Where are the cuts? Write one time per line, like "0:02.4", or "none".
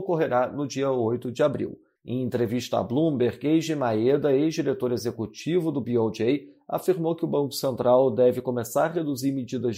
0:02.0